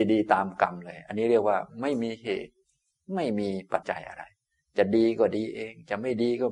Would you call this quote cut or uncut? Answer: cut